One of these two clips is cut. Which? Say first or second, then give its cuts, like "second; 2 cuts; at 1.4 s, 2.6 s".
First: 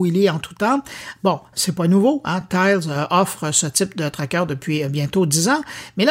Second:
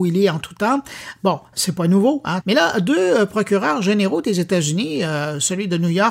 second; 1 cut; at 2.4 s